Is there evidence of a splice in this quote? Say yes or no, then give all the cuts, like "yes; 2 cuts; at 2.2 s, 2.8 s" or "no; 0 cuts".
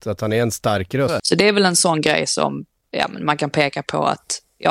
yes; 1 cut; at 1.2 s